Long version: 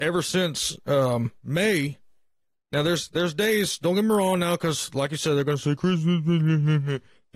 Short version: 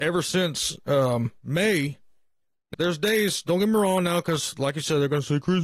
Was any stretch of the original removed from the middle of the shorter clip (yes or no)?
yes